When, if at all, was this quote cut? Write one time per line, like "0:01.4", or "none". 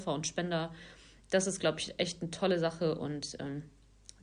none